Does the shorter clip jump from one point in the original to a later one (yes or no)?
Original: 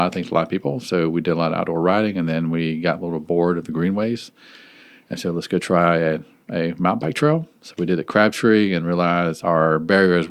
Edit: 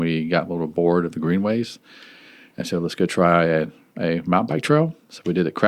no